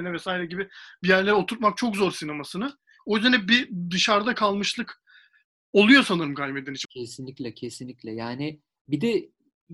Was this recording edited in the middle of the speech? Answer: yes; 1 cut; at 6.8 s

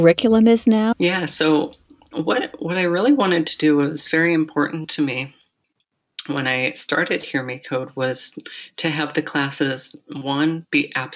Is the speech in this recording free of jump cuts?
no; 1 cut; at 0.9 s

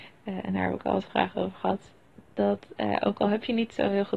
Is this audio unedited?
yes; 0 cuts

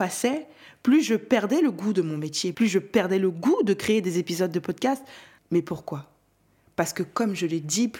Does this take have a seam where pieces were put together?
yes; 2 cuts; at 2.5 s, 5.4 s

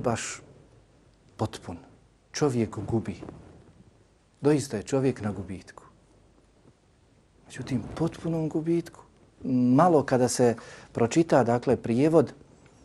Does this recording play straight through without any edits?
no; 1 cut; at 9.4 s

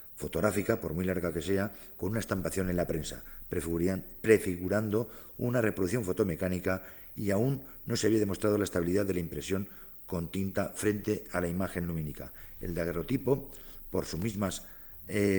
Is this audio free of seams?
yes; 0 cuts

